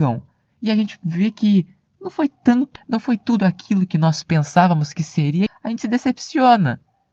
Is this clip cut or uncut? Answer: cut